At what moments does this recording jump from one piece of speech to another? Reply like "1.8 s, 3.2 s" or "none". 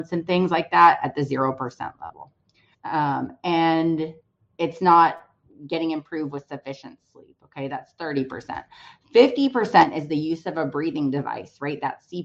2.7 s